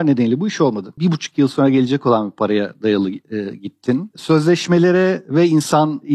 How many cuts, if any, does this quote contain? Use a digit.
1